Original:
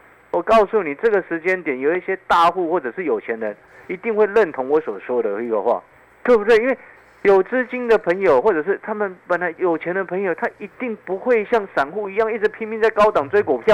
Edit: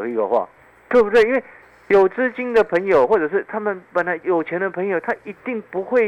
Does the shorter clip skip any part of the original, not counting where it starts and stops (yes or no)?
no